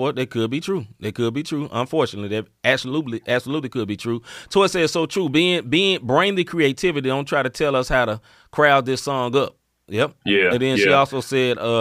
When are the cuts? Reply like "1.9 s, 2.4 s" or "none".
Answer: none